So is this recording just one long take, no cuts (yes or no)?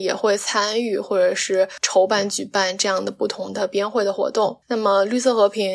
no